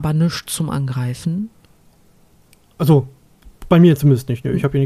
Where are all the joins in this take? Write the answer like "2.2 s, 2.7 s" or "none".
none